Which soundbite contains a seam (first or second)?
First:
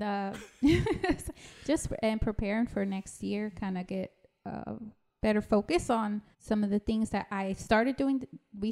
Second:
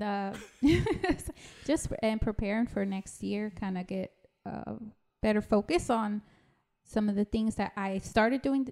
first